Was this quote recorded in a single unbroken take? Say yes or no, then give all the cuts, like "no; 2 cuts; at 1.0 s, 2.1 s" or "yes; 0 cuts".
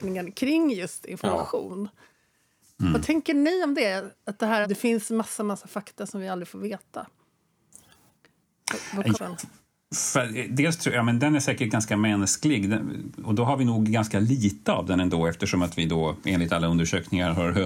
no; 2 cuts; at 4.6 s, 9.1 s